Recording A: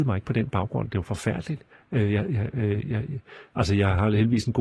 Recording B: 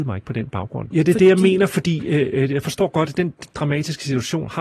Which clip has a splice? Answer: B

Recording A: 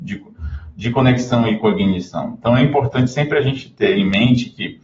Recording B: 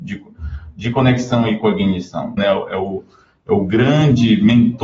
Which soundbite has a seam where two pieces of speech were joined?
B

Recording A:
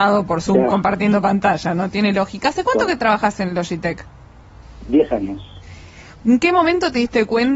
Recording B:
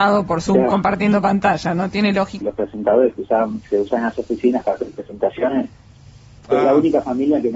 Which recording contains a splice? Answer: B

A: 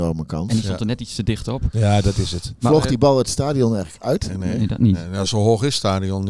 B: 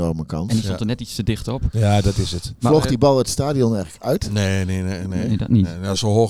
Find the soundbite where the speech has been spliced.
A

